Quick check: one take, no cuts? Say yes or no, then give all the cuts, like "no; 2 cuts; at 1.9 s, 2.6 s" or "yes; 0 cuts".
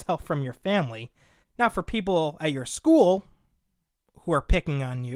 no; 1 cut; at 1.4 s